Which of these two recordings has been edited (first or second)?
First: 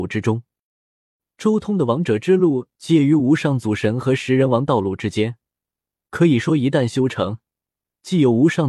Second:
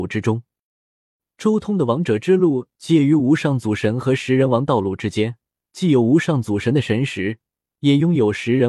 second